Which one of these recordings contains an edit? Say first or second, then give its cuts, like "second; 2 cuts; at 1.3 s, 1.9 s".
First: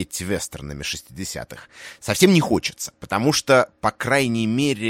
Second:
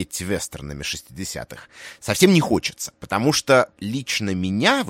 second; 1 cut; at 3.8 s